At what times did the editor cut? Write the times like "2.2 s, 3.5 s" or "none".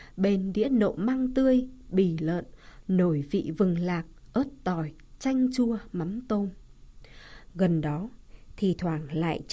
7.5 s